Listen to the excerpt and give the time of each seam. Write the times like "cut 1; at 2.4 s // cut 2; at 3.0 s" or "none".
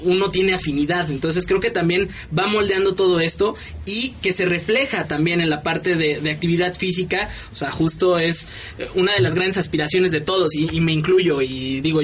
cut 1; at 7.5 s